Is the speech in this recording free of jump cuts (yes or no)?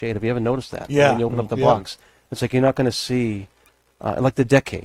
yes